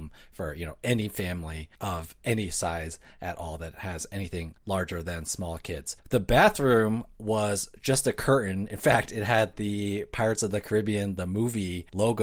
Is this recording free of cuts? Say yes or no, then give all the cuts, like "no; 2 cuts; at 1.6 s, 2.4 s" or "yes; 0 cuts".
yes; 0 cuts